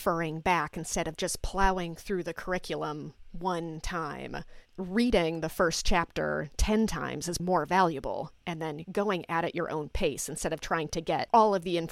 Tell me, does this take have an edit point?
yes; 1 cut; at 7.4 s

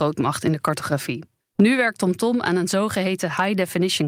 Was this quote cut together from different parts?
yes; 1 cut; at 1.4 s

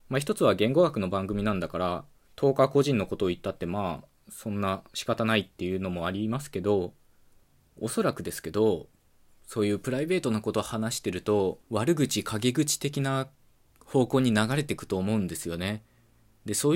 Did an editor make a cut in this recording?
yes; 1 cut; at 11.6 s

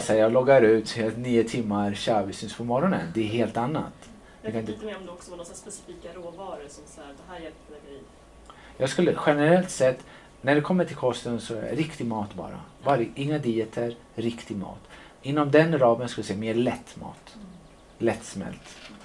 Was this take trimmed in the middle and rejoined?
no; 0 cuts

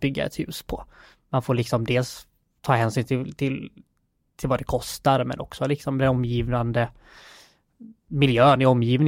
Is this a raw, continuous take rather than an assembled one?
yes; 0 cuts

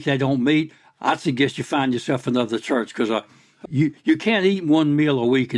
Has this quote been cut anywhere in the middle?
yes; 1 cut; at 3.7 s

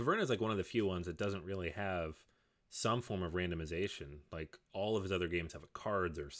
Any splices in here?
no; 0 cuts

